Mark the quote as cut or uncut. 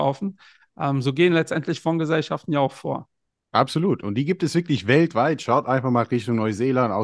uncut